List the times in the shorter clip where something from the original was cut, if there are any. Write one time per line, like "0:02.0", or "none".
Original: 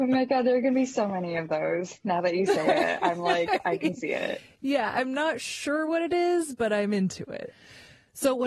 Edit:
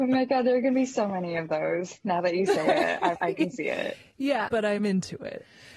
0:03.1
0:04.5